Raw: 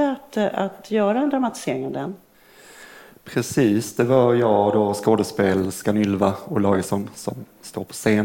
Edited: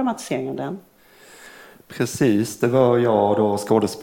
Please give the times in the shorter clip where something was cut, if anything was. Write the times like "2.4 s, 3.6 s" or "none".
none